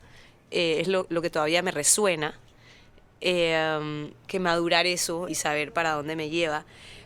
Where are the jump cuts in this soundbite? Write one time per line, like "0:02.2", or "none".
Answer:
0:04.3
0:05.3